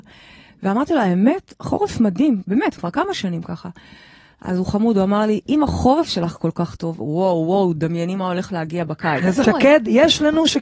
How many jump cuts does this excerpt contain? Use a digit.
2